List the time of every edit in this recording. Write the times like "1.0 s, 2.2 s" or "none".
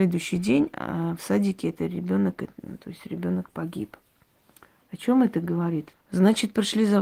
5.9 s